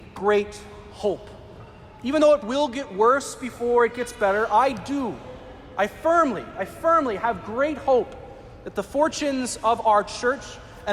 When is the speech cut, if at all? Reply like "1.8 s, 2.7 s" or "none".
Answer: 2.4 s